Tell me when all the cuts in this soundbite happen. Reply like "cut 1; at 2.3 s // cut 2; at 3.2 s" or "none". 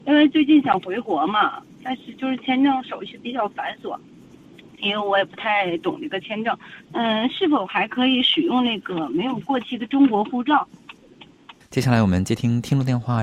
cut 1; at 6.8 s // cut 2; at 11.6 s